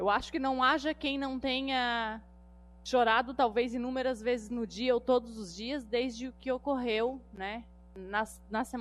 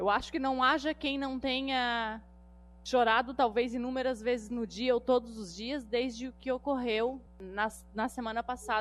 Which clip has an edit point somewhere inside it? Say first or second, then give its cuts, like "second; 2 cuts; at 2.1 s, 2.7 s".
second; 1 cut; at 7.3 s